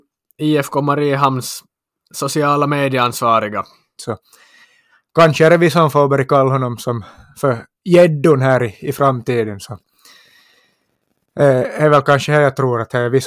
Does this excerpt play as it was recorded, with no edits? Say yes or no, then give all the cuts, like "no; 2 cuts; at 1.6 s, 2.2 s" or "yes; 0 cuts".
no; 1 cut; at 4.0 s